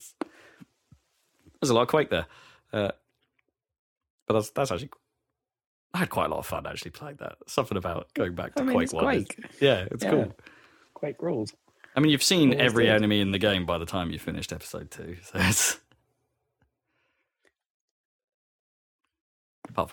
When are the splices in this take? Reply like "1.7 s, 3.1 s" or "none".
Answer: none